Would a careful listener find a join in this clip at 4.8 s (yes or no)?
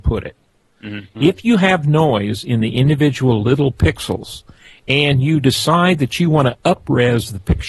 no